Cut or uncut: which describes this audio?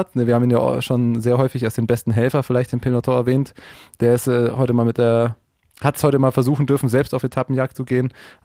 uncut